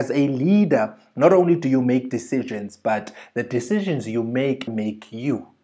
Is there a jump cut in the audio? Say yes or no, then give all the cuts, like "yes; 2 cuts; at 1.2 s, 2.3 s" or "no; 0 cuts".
yes; 1 cut; at 4.7 s